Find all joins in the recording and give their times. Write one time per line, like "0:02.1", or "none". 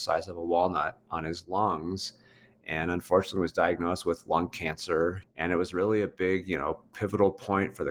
0:05.2